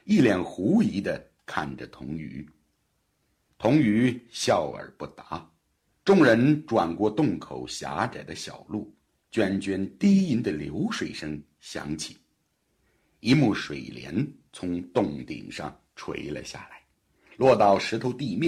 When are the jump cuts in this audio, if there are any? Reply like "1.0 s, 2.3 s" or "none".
none